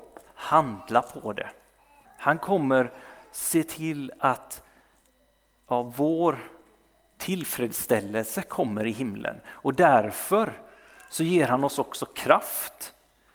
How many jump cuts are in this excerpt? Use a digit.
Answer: 1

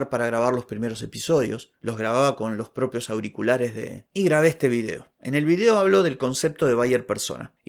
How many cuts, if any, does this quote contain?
1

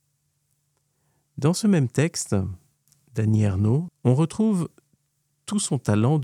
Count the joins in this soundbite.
1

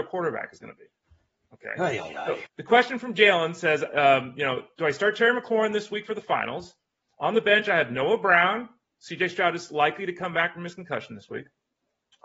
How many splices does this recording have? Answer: 1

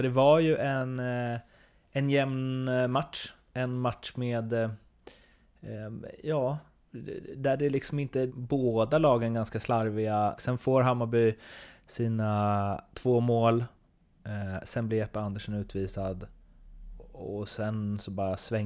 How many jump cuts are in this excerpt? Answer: 2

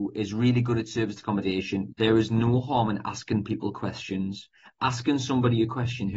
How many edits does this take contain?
1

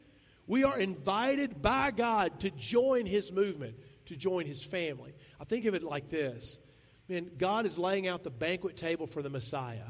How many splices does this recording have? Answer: 0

